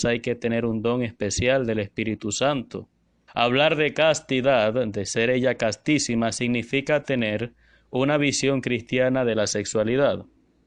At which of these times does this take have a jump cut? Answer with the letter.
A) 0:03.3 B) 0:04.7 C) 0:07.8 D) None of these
A